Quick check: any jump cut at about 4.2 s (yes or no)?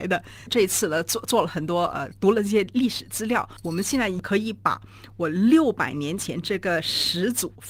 yes